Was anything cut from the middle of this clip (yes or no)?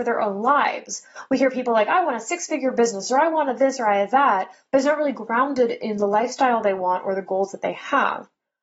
no